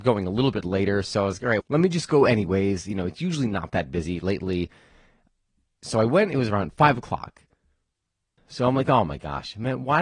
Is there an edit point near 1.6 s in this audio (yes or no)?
yes